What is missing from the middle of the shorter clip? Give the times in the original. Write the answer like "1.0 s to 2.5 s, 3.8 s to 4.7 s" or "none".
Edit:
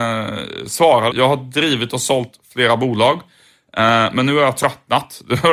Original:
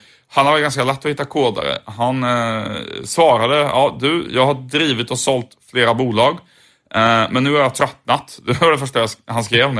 3.5 s to 4.3 s